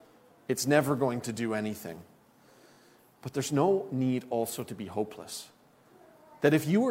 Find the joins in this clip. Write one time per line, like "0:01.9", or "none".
none

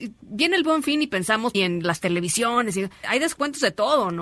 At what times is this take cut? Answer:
0:01.5
0:03.0

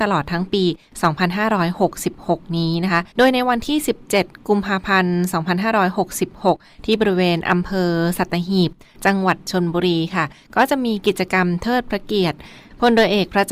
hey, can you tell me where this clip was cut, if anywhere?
0:03.1

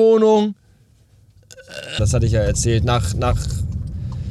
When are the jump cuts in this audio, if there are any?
0:02.0
0:03.1

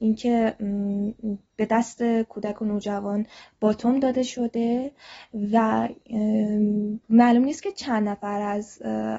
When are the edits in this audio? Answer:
0:01.5
0:07.0

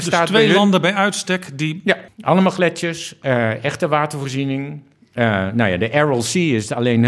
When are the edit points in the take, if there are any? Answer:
0:02.1

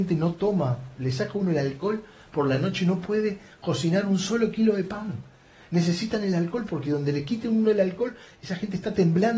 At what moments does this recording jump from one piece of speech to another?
none

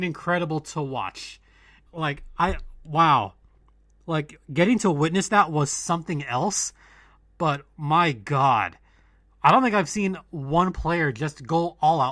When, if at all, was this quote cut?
0:01.9

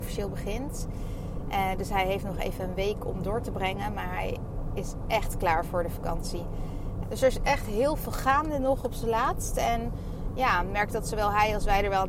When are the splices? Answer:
0:07.0

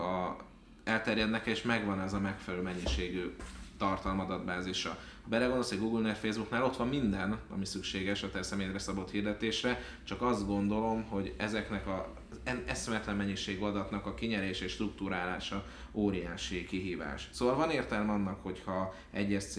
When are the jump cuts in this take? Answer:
none

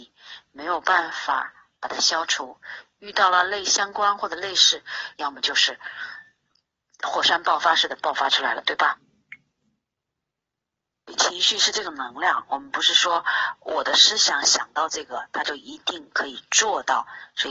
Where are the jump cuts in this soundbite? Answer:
0:05.1

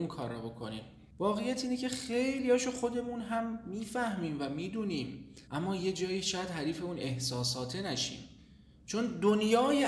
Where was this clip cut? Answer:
0:05.4

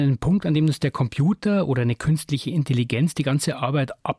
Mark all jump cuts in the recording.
none

